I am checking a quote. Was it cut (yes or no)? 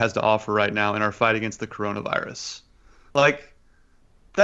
no